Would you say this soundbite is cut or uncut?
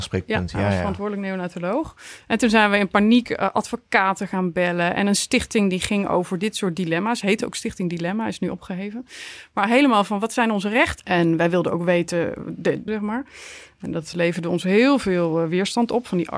cut